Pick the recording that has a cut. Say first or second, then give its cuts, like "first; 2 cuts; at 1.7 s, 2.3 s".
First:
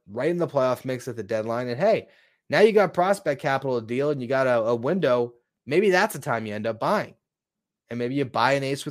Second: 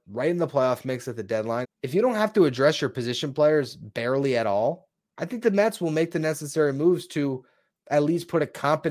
second; 2 cuts; at 1.6 s, 5.1 s